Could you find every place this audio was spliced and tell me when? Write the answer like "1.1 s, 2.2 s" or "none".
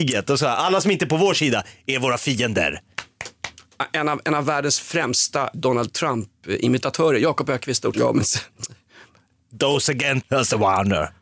5.5 s, 7.9 s, 10.2 s